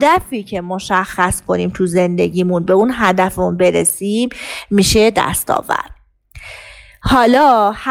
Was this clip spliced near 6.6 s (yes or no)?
no